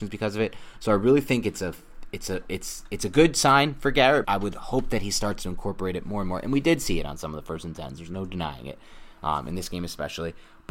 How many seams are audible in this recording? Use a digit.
1